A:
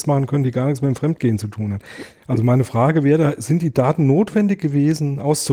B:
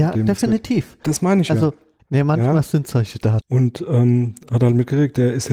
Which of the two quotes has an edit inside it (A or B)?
B